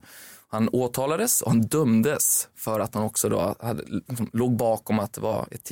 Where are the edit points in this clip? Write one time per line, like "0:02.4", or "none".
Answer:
none